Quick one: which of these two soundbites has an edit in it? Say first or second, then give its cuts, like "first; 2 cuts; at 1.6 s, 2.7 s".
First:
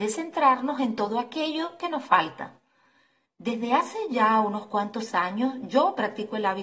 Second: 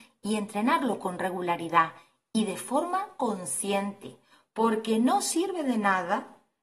first; 1 cut; at 3.3 s